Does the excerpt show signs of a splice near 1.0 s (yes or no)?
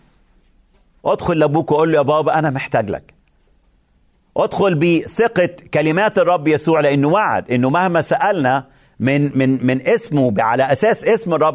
no